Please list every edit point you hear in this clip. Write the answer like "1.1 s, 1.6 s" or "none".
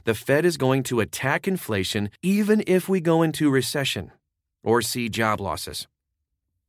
2.2 s